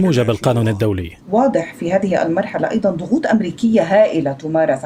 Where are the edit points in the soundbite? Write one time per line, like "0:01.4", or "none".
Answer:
0:01.2